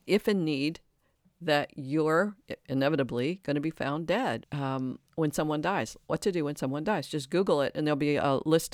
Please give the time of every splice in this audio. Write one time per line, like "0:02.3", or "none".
0:04.4